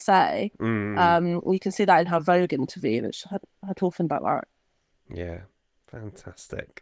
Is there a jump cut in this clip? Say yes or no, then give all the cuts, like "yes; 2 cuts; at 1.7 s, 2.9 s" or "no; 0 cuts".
no; 0 cuts